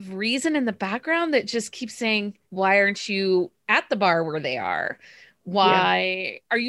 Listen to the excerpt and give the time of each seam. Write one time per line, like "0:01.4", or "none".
0:02.4